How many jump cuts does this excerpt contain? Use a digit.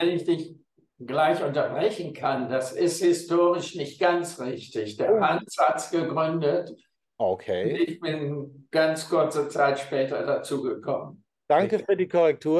0